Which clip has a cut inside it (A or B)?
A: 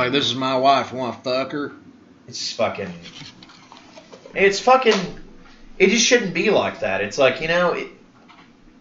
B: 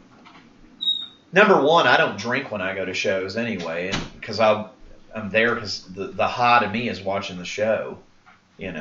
A